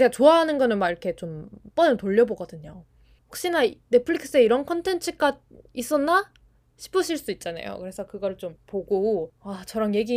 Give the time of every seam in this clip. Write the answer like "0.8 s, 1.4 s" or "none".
3.2 s